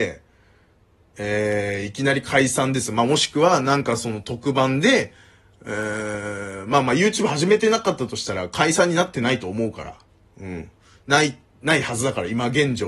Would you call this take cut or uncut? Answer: uncut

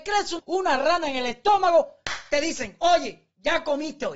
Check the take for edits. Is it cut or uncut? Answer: uncut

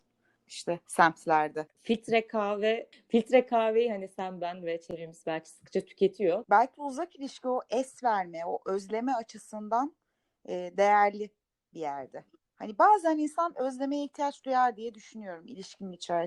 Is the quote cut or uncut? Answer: cut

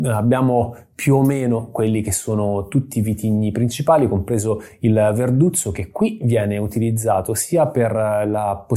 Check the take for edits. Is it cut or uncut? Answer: uncut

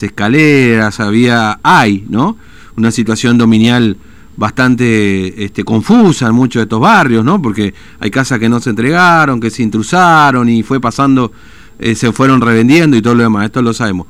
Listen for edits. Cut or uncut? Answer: uncut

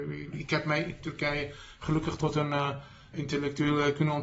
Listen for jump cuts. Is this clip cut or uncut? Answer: cut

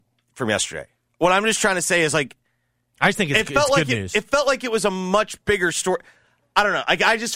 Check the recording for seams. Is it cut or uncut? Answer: uncut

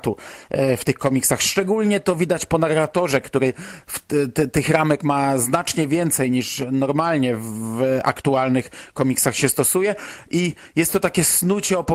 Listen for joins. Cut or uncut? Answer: uncut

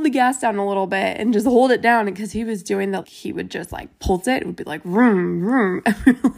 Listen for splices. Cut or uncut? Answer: cut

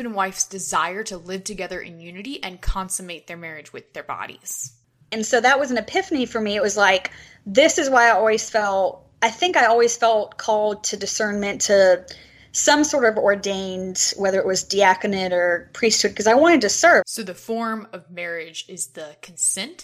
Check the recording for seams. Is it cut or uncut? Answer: cut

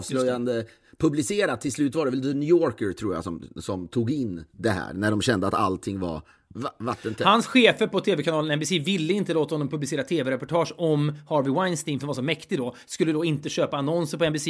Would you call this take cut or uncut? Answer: cut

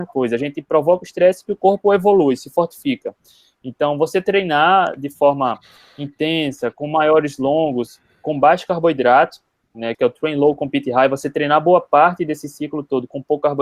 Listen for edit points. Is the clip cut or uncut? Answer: cut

